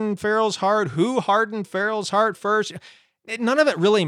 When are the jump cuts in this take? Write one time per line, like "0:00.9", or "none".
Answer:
none